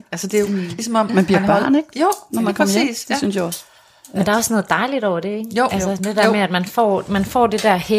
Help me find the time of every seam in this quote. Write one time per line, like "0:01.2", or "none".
none